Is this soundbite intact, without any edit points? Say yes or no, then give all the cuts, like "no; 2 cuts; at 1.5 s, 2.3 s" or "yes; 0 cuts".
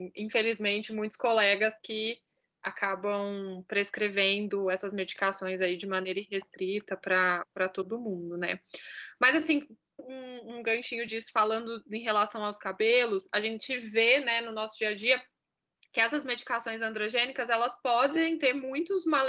no; 1 cut; at 10.0 s